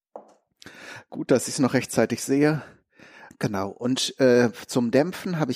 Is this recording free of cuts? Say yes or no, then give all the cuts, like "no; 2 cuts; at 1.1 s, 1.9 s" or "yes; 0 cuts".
no; 1 cut; at 3.3 s